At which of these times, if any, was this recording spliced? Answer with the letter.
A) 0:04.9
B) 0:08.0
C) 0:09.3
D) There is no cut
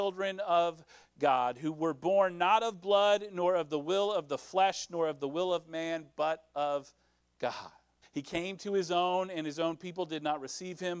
B